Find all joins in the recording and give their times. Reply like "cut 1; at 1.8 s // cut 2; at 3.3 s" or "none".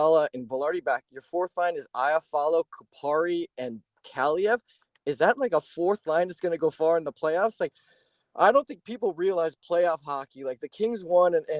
none